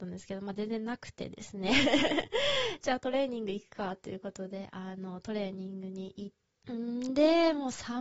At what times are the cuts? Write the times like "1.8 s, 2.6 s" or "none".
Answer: 6.6 s